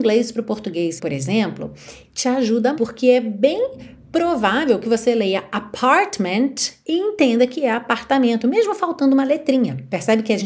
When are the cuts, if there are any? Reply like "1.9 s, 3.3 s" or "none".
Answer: 1.0 s, 2.7 s